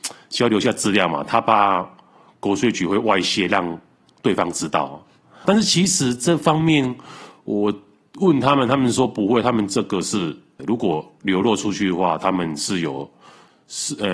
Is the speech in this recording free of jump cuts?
no; 2 cuts; at 5.4 s, 10.6 s

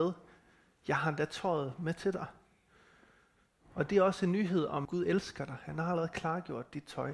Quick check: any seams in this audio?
yes; 1 cut; at 4.8 s

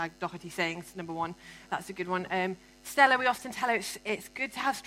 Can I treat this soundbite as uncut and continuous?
yes; 0 cuts

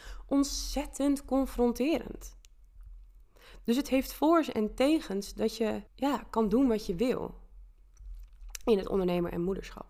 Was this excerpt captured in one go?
no; 1 cut; at 5.9 s

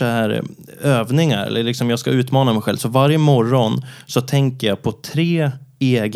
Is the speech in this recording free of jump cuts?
yes; 0 cuts

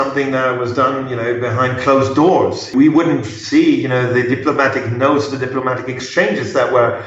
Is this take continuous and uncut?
yes; 0 cuts

